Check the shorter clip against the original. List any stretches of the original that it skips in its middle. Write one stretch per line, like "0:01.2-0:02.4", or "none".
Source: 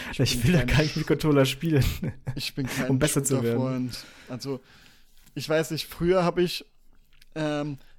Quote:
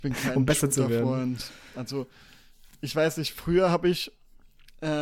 none